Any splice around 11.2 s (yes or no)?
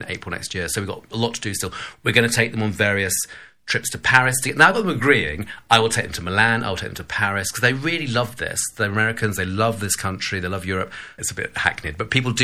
yes